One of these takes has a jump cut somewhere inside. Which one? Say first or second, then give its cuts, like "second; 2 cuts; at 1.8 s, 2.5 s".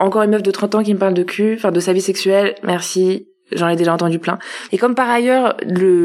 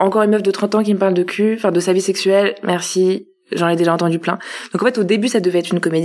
first; 1 cut; at 4.7 s